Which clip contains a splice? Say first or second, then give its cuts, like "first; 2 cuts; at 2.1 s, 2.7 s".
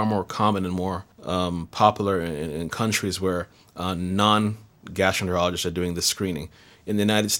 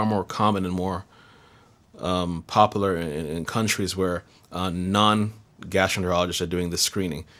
first; 1 cut; at 1.1 s